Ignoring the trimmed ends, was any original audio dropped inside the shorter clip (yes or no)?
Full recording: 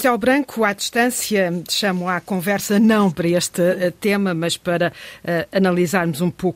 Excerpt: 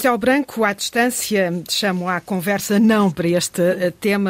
no